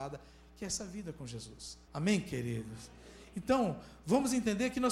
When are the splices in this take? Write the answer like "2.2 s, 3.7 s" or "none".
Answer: 1.8 s